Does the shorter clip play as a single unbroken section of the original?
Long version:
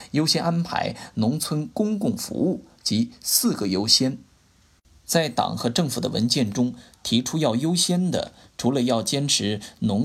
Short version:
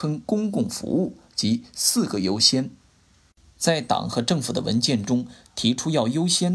yes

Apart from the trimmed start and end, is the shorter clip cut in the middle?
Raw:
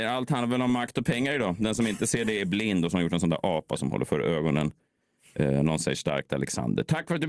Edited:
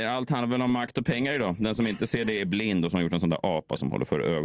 no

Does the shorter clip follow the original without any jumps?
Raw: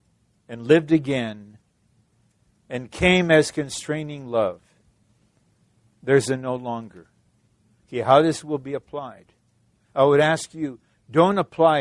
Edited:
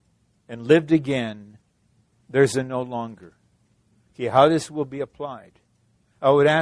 no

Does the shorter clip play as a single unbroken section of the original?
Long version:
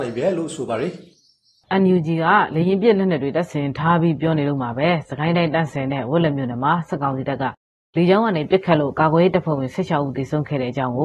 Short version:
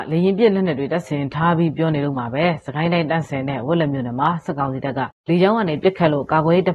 no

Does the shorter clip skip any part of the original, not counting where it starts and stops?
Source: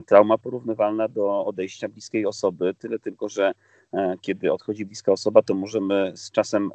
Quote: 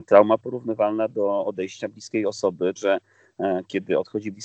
yes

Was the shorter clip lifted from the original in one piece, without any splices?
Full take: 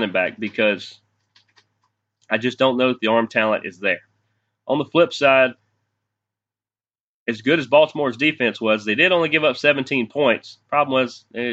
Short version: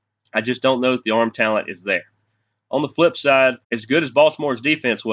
no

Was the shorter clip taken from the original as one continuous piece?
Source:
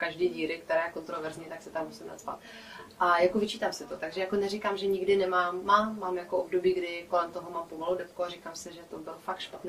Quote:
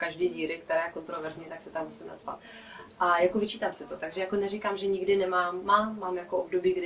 yes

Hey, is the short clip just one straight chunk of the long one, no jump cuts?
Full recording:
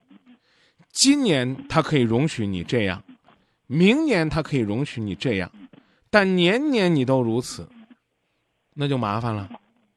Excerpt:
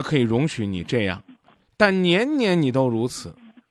no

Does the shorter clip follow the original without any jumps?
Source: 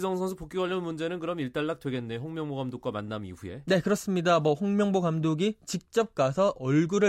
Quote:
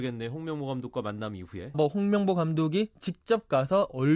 no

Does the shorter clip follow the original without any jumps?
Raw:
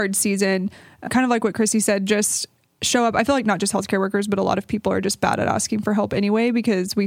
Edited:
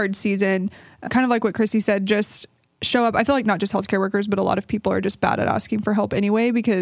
yes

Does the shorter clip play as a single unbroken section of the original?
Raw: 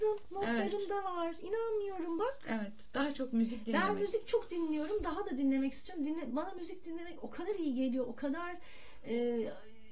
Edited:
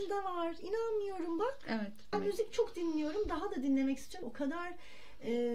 no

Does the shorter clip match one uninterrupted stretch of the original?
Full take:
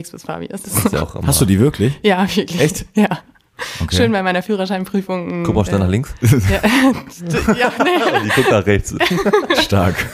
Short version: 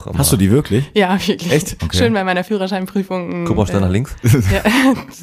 no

